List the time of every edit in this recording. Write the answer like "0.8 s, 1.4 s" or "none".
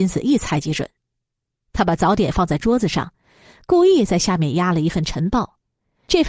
none

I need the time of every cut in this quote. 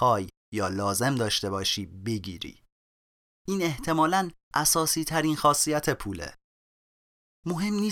none

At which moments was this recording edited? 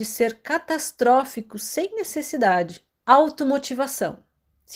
3.0 s

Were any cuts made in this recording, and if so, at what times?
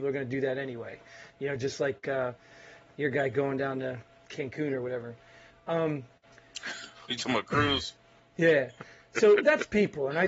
none

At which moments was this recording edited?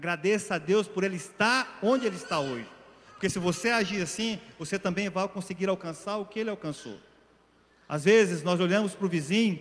none

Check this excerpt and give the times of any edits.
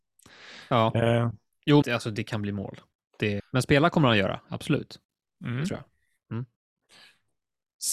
1.8 s, 3.4 s

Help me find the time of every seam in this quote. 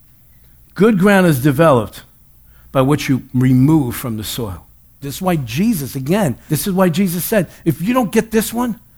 5.0 s, 6.5 s

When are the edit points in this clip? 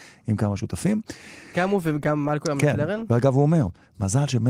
1.5 s

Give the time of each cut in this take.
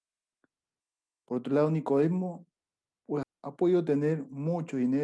3.2 s

